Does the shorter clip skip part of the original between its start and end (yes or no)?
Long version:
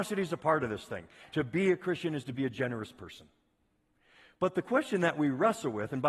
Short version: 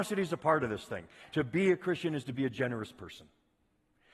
no